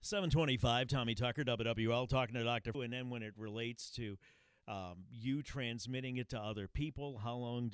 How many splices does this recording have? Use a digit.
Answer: 1